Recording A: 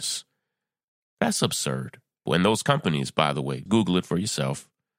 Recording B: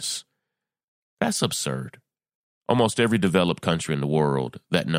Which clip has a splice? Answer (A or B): A